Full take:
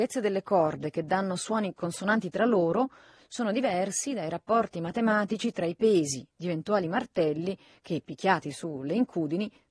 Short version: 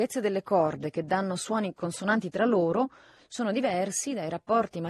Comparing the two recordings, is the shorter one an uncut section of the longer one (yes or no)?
yes